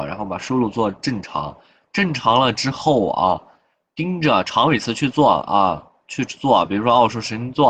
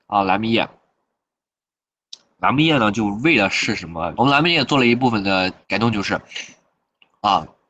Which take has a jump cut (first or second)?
second